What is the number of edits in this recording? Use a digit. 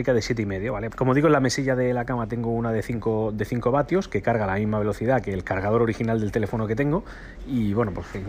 1